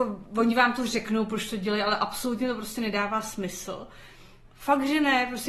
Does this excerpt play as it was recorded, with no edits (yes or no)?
no